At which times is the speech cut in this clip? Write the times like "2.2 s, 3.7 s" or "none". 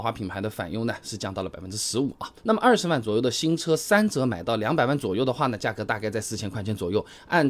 2.4 s